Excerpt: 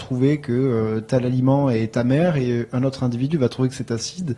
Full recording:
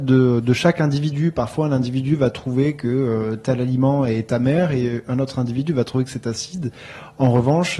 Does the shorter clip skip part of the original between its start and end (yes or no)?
no